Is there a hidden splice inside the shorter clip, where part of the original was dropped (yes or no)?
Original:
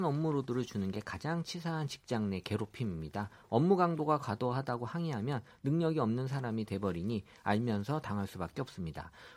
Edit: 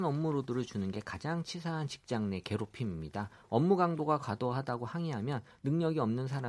no